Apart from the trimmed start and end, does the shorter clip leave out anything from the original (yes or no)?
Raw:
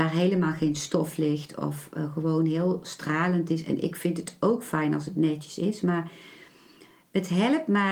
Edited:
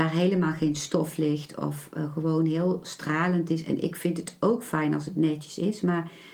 no